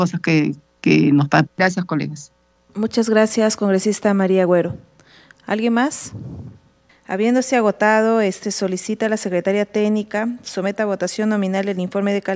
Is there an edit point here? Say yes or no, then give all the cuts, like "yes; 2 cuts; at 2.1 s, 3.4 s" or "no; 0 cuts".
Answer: yes; 2 cuts; at 1.5 s, 8.4 s